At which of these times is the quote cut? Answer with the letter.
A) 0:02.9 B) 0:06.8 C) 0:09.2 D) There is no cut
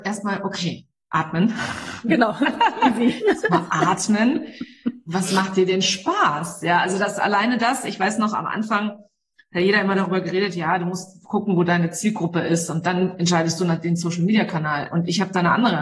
D